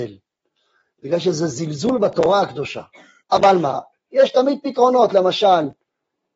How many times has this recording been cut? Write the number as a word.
one